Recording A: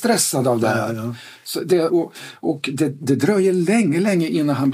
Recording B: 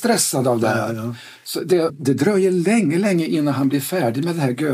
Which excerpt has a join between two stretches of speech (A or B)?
B